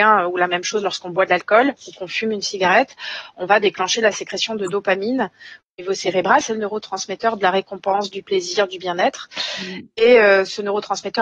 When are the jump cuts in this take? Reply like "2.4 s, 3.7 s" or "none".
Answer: 6.4 s